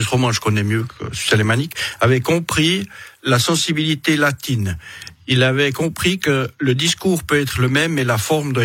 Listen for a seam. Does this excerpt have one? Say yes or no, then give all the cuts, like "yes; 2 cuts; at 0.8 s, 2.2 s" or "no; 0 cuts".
no; 0 cuts